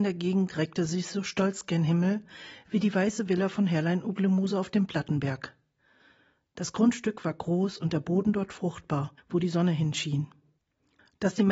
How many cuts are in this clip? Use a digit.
0